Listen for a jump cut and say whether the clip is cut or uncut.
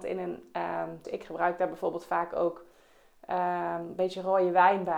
cut